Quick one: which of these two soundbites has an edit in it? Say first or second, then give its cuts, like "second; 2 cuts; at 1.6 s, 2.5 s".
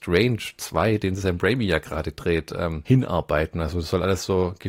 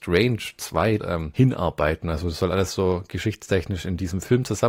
second; 1 cut; at 1.0 s